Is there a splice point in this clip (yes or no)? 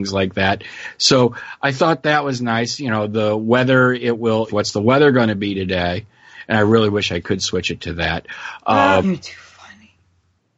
yes